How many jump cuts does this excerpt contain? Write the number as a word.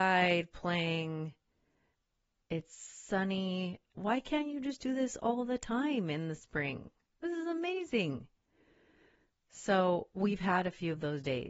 one